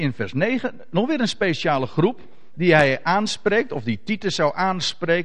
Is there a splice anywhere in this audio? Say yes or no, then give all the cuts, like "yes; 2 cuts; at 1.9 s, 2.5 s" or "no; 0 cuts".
no; 0 cuts